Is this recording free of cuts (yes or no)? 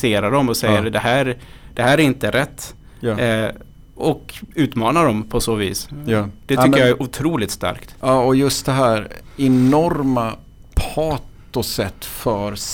yes